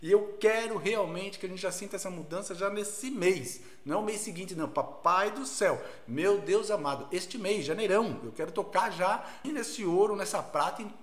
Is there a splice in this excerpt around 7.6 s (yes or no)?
no